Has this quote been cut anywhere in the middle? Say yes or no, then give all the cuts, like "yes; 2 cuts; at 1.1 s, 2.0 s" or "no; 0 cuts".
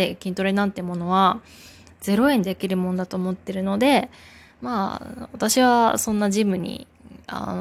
yes; 1 cut; at 2.4 s